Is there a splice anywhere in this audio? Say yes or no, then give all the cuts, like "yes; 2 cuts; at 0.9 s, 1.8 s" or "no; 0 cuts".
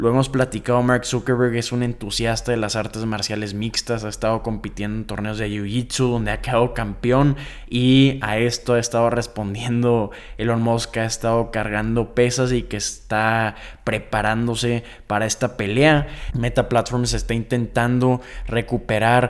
yes; 1 cut; at 16.3 s